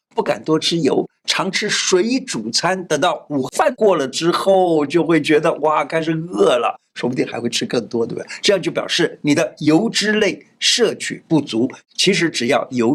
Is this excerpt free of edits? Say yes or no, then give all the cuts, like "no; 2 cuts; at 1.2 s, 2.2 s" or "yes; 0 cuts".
yes; 0 cuts